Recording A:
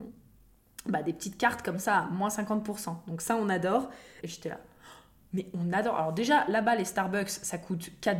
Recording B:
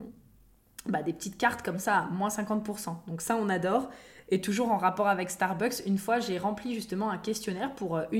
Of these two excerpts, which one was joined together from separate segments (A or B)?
A